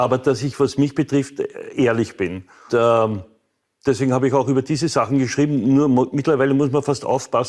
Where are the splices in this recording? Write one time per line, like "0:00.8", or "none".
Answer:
0:02.7